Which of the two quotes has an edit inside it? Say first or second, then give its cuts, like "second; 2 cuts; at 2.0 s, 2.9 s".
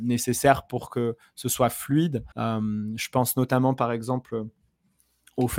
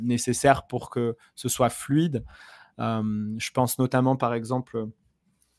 first; 1 cut; at 2.3 s